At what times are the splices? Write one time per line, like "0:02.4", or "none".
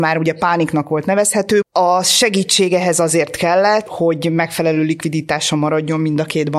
0:01.6
0:03.9